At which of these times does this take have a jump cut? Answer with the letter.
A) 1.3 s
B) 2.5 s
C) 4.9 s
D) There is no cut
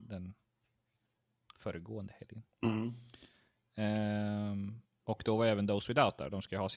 B